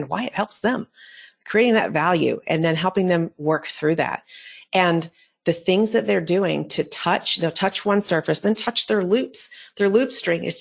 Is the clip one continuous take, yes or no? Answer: no